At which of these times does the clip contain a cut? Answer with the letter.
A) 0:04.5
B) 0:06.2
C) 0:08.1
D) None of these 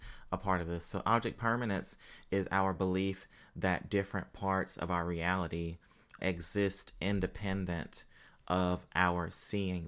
B